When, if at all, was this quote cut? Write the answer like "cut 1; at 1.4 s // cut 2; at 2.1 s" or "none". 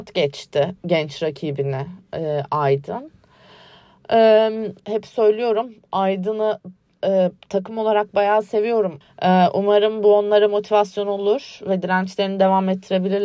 cut 1; at 4.8 s // cut 2; at 9.0 s